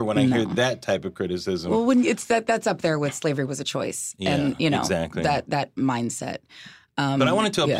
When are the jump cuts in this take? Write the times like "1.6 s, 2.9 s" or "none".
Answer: none